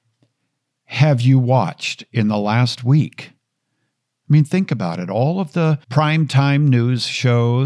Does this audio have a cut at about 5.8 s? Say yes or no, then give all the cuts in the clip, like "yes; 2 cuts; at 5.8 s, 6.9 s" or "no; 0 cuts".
yes; 1 cut; at 5.8 s